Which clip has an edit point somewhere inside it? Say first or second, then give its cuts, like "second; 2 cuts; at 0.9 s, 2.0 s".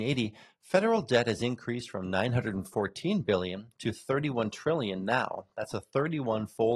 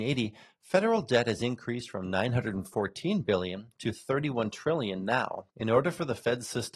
second; 1 cut; at 5.5 s